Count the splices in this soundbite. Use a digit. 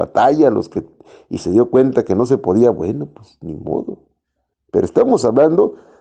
1